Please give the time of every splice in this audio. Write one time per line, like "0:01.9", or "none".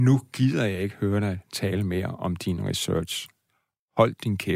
none